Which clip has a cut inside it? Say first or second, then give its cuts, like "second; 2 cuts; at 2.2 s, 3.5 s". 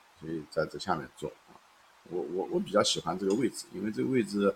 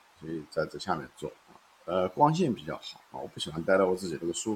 second; 1 cut; at 1.7 s